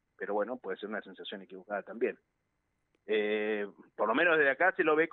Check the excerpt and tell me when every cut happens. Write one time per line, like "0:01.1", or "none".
0:03.0